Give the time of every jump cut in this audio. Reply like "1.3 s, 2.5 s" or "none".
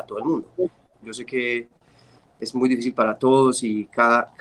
1.0 s